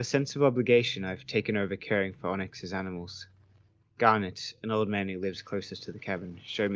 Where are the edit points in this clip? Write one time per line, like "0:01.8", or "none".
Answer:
none